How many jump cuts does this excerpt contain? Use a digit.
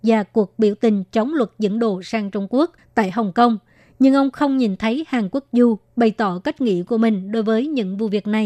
0